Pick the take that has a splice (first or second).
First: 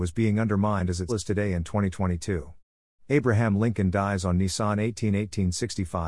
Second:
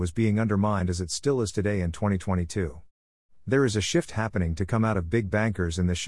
first